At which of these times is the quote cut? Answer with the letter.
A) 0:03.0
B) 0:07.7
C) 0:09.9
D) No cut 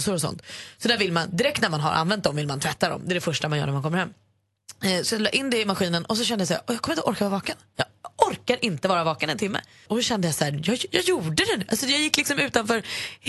C